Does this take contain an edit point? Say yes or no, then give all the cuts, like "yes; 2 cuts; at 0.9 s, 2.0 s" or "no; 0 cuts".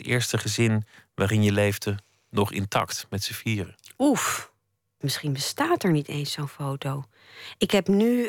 yes; 1 cut; at 5.0 s